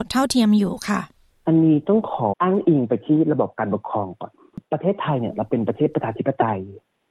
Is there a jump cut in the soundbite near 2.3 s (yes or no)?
yes